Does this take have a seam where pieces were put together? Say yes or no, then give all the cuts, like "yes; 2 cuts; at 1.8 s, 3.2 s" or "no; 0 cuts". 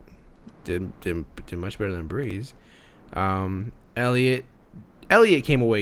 no; 0 cuts